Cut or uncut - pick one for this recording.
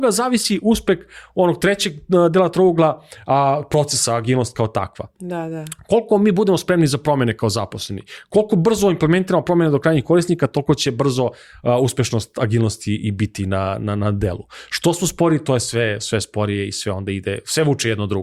uncut